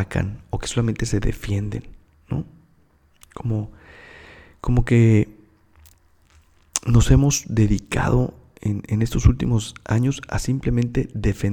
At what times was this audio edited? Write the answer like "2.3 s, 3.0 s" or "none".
none